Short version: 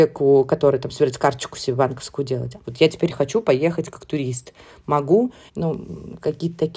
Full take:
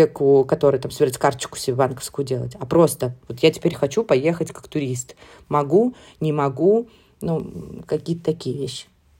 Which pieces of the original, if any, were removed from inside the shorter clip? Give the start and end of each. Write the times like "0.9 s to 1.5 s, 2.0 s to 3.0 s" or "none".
2.6 s to 3.2 s, 6.1 s to 7.1 s